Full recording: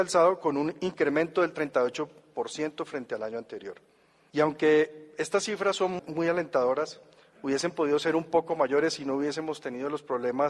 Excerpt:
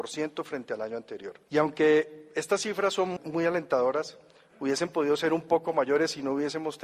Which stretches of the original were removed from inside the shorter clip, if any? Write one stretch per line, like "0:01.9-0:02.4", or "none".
0:03.9-0:04.3